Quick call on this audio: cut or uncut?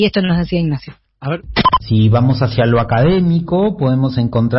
uncut